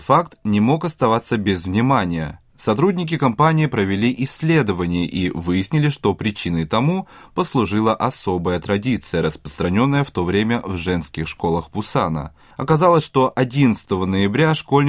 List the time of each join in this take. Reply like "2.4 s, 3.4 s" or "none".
none